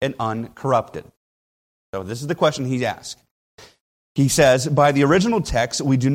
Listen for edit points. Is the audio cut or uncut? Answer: uncut